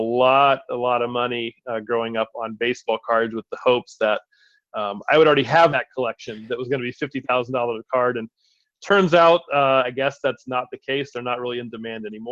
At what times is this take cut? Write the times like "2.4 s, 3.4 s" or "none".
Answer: none